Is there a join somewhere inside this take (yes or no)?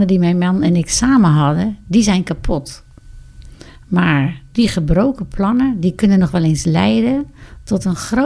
no